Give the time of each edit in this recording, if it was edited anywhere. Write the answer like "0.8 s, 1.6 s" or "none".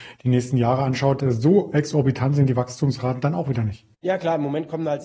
3.9 s